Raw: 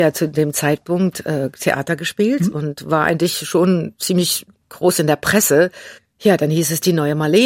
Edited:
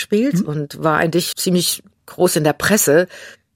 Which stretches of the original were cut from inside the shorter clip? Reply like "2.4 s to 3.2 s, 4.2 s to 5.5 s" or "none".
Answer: 3.4 s to 4.0 s